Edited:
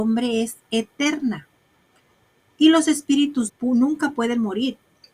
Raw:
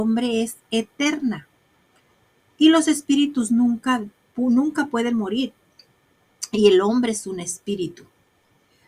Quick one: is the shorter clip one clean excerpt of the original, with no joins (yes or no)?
no